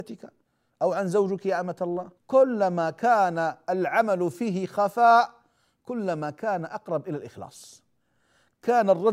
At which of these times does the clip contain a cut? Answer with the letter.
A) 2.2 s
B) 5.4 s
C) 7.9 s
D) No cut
A